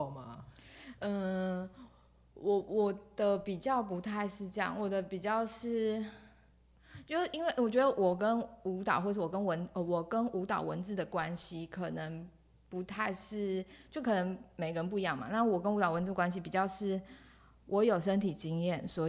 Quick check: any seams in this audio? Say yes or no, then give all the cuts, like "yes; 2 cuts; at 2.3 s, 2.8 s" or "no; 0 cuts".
no; 0 cuts